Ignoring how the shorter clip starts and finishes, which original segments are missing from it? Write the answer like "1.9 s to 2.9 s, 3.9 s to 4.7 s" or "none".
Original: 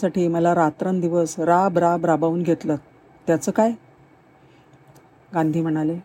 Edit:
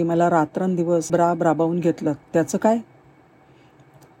1.3 s to 1.7 s, 2.9 s to 3.2 s